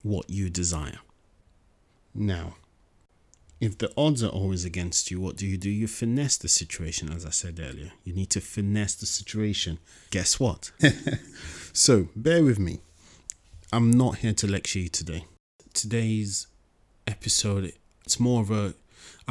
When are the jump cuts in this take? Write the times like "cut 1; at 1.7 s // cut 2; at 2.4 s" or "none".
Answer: cut 1; at 10.8 s